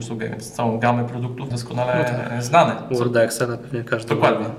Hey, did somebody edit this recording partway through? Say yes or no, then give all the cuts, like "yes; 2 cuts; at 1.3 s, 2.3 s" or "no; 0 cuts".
yes; 1 cut; at 1.5 s